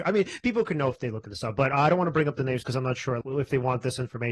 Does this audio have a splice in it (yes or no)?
yes